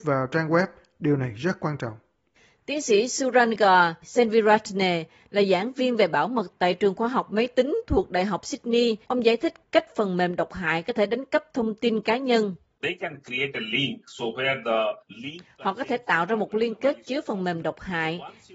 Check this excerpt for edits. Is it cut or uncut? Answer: cut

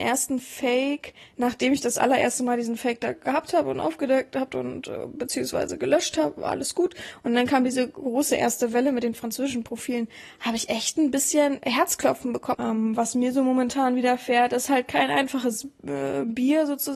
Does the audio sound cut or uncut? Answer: cut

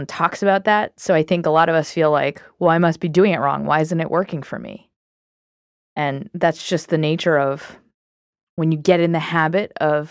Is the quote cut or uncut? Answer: uncut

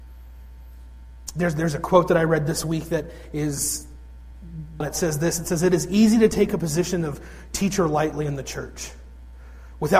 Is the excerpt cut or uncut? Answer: cut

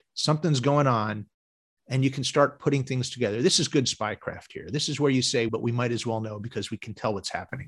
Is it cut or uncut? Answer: cut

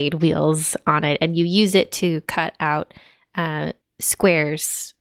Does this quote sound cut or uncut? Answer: uncut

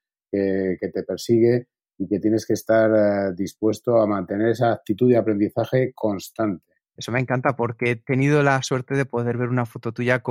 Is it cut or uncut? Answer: cut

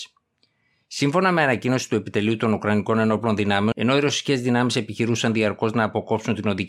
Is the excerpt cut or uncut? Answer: cut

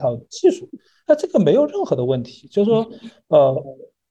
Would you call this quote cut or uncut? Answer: uncut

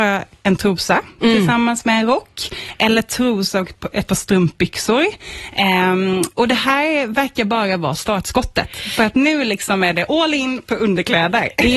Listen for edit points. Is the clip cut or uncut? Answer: uncut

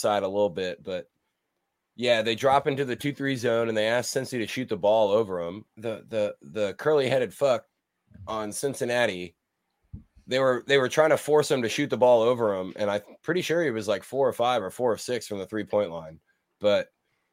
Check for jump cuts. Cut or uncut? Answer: cut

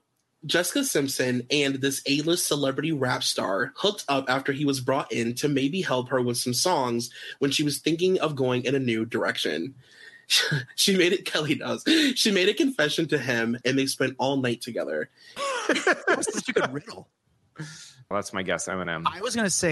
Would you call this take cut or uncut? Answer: cut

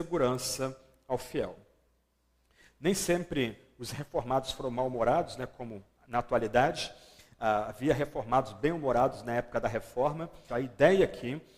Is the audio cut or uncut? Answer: cut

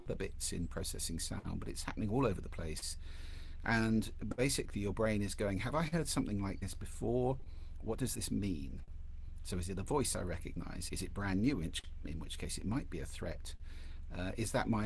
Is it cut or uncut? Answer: cut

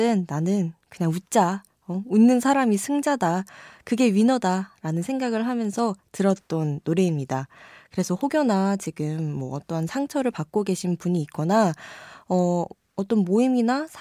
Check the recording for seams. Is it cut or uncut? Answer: uncut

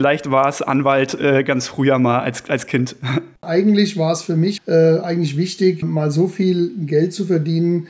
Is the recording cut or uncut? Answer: cut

